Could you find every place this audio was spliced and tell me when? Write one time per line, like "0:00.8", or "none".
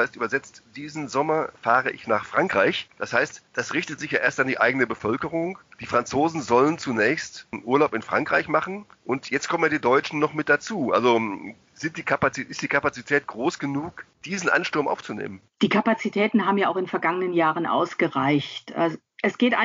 none